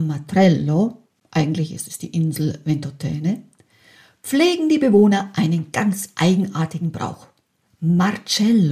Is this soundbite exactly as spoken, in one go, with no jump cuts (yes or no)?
no